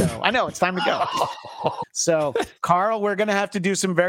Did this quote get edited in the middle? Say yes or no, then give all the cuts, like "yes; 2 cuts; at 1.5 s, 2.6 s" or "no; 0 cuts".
yes; 1 cut; at 1.8 s